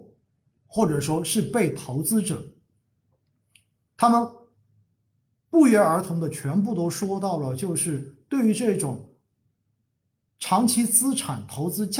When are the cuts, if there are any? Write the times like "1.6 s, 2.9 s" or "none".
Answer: 3.9 s